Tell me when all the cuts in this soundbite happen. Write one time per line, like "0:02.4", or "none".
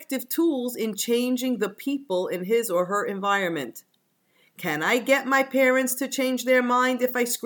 none